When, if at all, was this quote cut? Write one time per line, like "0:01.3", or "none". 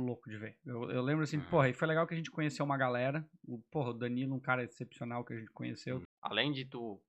0:06.0

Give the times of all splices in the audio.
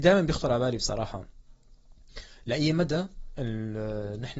none

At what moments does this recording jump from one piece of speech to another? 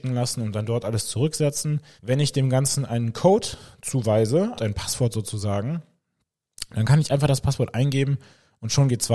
0:02.0
0:04.6

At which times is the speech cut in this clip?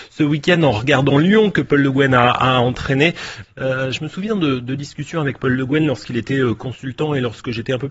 0:03.4

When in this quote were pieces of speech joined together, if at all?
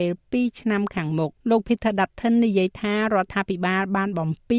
0:01.4

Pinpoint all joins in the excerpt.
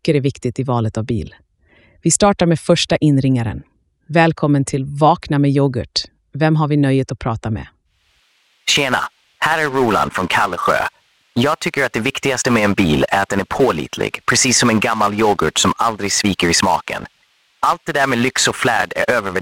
none

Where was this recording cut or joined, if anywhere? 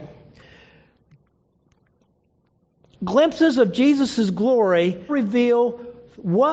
0:05.1

